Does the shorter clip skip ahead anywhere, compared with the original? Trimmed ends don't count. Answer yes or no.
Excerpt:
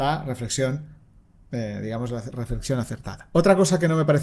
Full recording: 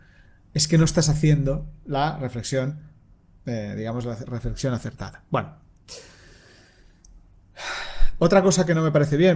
yes